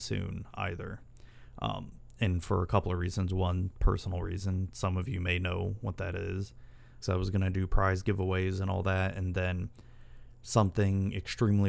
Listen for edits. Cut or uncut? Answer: cut